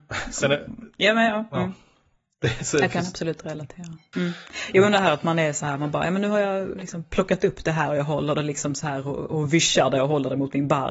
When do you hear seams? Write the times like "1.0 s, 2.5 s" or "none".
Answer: 4.1 s